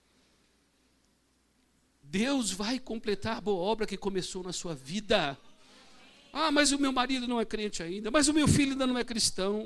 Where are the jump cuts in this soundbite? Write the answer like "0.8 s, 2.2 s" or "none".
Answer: none

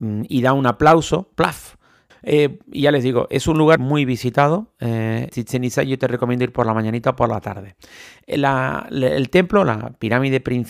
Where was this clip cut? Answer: 2.1 s, 3.8 s, 5.3 s

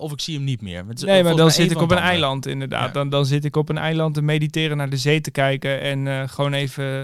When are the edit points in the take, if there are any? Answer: none

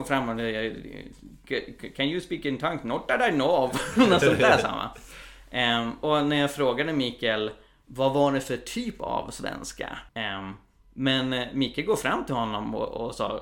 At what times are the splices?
6.0 s, 10.1 s

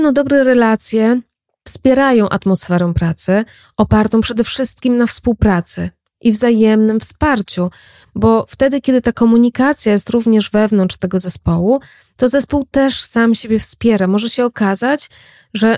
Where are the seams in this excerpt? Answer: none

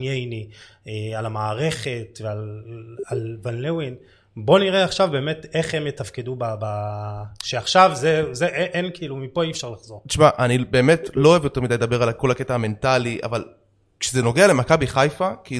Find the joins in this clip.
none

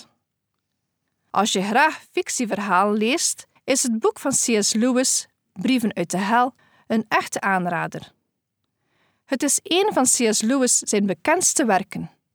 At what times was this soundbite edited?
none

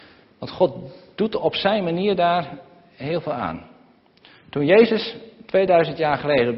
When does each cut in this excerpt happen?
none

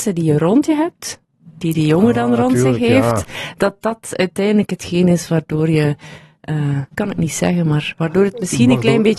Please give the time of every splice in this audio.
6.9 s

